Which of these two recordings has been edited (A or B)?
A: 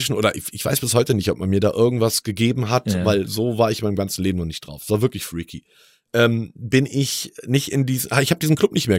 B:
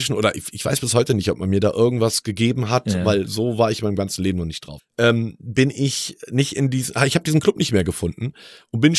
B